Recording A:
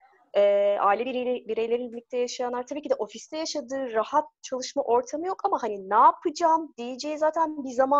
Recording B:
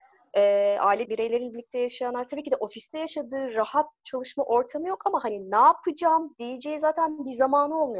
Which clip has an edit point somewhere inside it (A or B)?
B